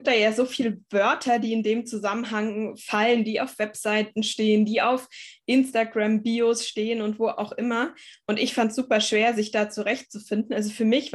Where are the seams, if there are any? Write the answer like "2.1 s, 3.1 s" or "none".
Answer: none